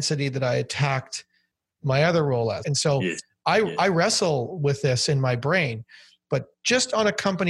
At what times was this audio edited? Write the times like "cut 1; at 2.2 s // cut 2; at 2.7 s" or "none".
cut 1; at 2.6 s